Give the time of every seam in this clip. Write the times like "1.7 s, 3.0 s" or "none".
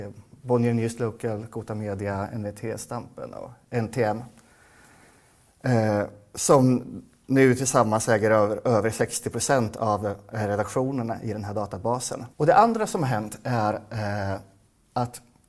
12.3 s